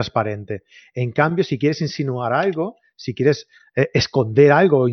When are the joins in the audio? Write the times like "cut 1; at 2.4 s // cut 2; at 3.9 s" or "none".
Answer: none

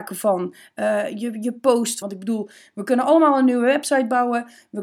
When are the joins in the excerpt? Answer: cut 1; at 2.0 s

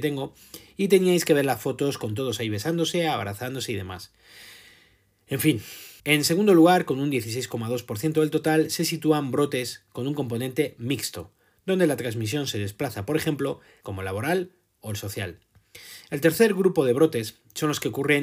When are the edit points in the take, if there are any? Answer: cut 1; at 6.0 s // cut 2; at 13.8 s

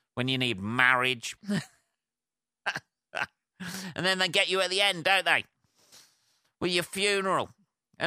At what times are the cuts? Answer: cut 1; at 1.4 s

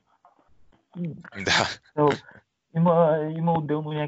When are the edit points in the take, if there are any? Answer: cut 1; at 1.3 s

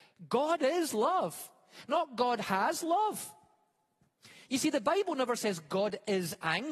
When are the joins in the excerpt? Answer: none

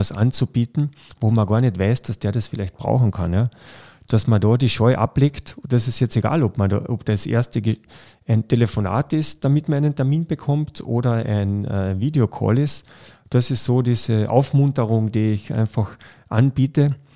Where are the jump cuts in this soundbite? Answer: none

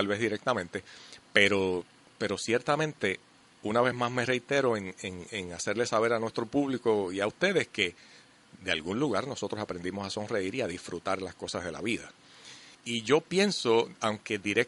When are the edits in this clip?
cut 1; at 12.7 s

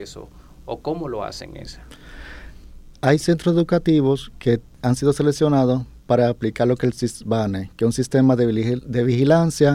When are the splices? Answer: none

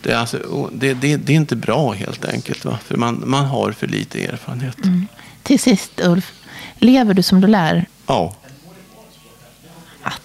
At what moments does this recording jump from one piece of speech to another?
cut 1; at 7.9 s

